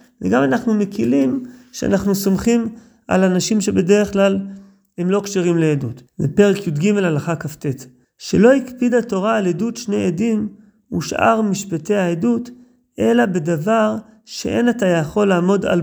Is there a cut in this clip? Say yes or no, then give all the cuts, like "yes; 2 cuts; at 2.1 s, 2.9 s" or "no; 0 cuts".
yes; 2 cuts; at 6.1 s, 8.0 s